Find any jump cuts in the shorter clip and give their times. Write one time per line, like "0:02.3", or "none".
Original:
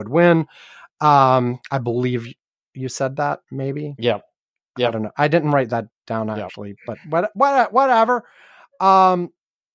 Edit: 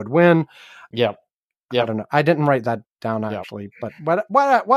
0:00.9